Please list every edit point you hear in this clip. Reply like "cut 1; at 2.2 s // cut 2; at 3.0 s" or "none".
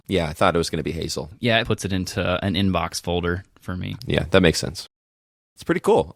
cut 1; at 1.6 s // cut 2; at 4.0 s